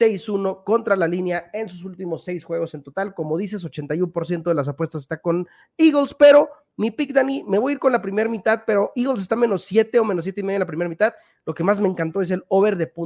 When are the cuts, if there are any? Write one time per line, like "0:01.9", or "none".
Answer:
none